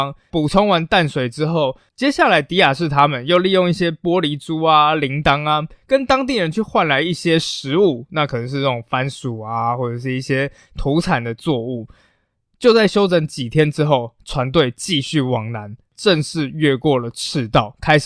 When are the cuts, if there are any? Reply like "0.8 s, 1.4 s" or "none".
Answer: none